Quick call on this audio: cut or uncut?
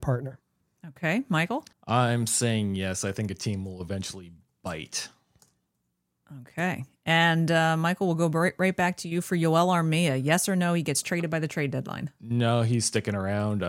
cut